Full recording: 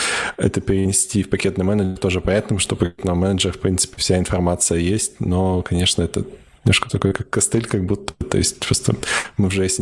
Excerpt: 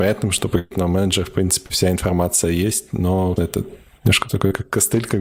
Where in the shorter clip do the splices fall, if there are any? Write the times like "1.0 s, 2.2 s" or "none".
3.4 s